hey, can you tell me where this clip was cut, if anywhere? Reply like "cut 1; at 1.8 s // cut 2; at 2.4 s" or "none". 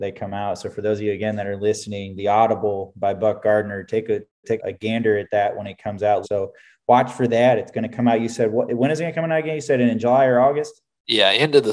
cut 1; at 4.6 s // cut 2; at 6.2 s